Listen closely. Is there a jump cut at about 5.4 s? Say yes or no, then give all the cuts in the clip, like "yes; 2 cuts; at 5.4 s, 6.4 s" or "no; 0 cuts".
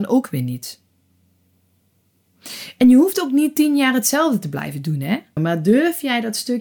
yes; 1 cut; at 5.4 s